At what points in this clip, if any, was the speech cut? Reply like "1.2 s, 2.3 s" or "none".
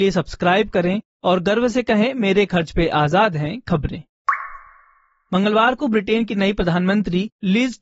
none